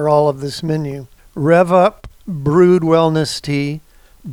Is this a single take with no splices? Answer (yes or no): no